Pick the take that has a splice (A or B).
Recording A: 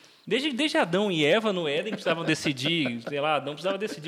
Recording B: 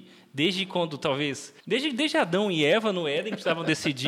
B